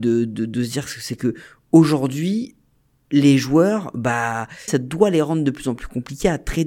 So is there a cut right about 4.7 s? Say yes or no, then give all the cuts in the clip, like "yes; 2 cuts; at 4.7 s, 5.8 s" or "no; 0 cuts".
yes; 1 cut; at 4.7 s